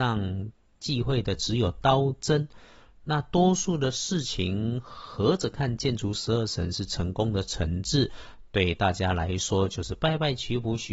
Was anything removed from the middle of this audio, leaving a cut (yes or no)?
no